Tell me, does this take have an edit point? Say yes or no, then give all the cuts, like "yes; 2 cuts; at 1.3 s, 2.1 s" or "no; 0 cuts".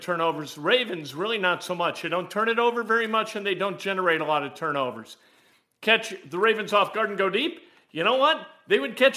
no; 0 cuts